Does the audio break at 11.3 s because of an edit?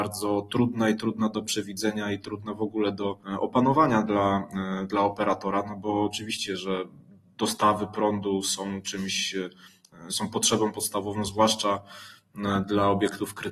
no; 0 cuts

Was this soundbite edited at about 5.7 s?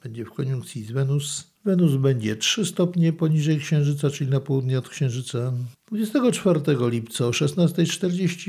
yes; 2 cuts; at 1.6 s, 5.7 s

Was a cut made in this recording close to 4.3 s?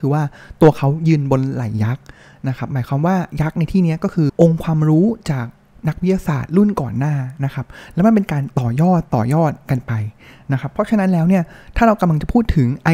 yes; 1 cut; at 4.3 s

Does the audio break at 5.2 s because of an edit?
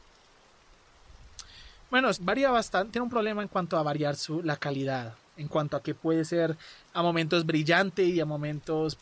no; 1 cut; at 2.1 s

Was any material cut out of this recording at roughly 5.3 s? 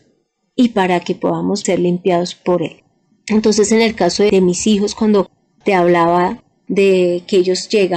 no; 2 cuts; at 1.6 s, 3.1 s

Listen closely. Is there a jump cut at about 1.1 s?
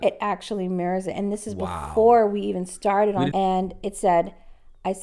no; 1 cut; at 3.3 s

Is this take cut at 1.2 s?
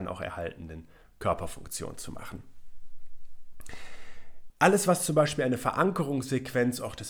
no; 1 cut; at 4.5 s

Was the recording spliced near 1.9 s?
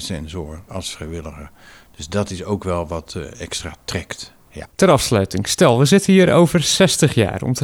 no; 1 cut; at 4.7 s

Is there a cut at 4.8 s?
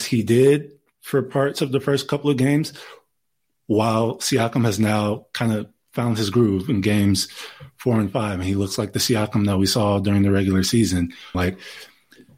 no; 1 cut; at 11.3 s

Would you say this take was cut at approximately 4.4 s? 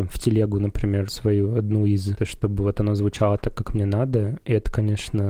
no; 2 cuts; at 1.1 s, 2.2 s

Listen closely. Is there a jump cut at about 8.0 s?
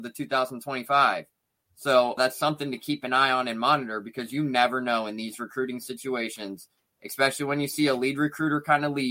no; 1 cut; at 2.2 s

